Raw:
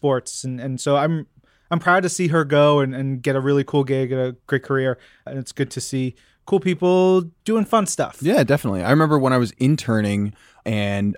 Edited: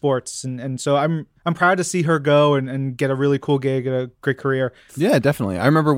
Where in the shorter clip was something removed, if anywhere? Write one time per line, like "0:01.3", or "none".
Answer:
0:01.4
0:04.9